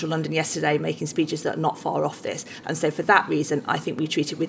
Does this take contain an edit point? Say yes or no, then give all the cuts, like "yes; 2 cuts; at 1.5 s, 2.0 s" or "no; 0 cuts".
no; 0 cuts